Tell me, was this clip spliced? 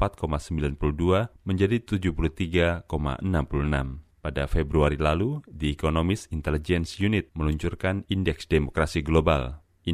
yes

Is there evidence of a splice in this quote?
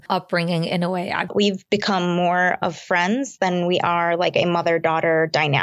yes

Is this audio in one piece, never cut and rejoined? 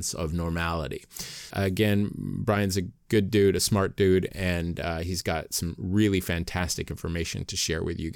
no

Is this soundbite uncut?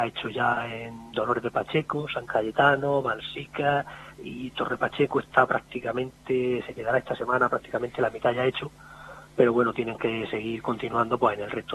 yes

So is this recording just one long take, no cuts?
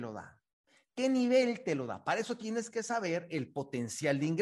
yes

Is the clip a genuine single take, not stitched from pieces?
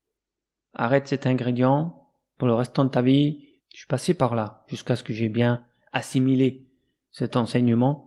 no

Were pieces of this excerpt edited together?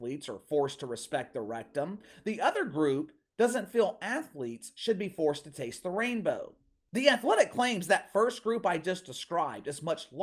no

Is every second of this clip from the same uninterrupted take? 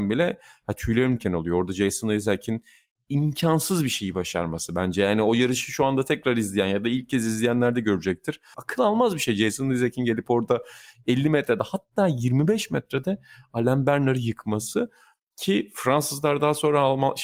no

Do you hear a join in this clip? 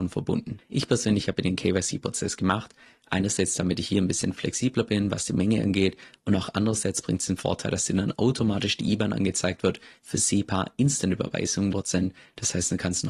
yes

